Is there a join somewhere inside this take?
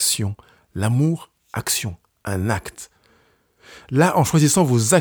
no; 0 cuts

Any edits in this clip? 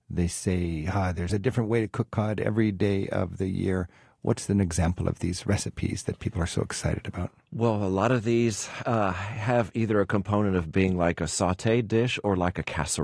no; 0 cuts

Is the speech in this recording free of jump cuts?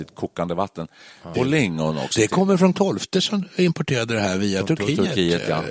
no; 2 cuts; at 1.3 s, 2.7 s

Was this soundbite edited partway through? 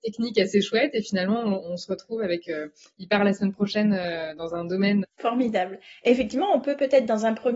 yes; 1 cut; at 5.0 s

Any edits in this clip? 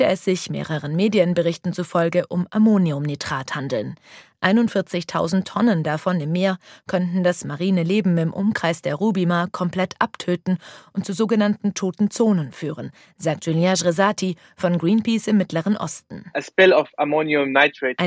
no; 0 cuts

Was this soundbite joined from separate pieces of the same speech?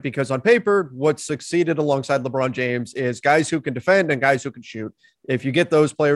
no; 0 cuts

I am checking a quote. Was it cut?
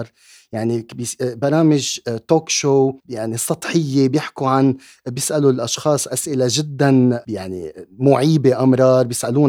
yes; 1 cut; at 3.0 s

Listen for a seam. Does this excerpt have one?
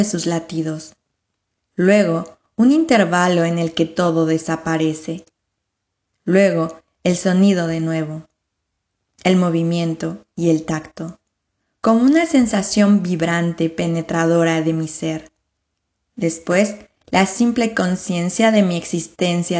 no; 0 cuts

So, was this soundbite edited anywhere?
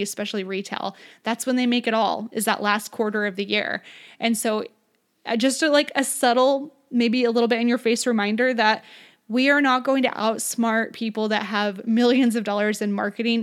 no; 0 cuts

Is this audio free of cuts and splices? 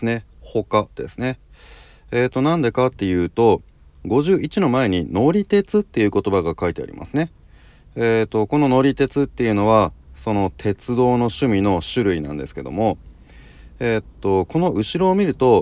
yes; 0 cuts

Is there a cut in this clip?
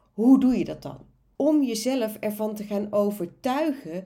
yes; 1 cut; at 1.4 s

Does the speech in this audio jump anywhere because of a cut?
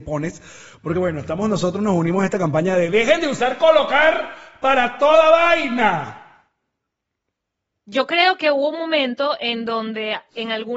no; 0 cuts

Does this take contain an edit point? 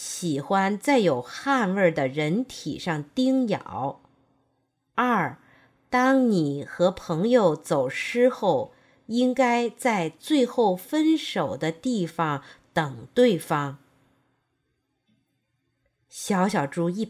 no; 0 cuts

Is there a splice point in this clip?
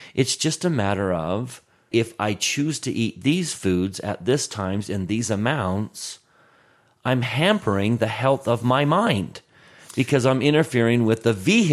yes; 1 cut; at 1.9 s

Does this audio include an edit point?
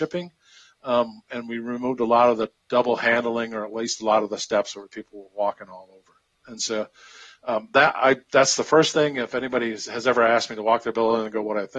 no; 0 cuts

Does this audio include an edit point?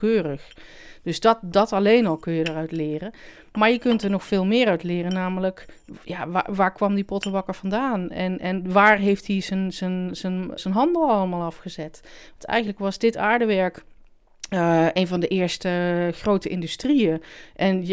yes; 1 cut; at 10.6 s

